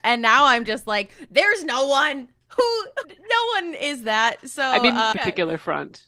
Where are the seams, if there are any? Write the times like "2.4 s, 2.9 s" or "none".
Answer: 3.0 s, 5.1 s